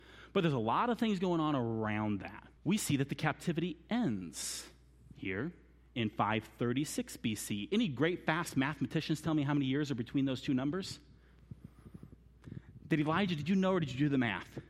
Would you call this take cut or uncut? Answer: cut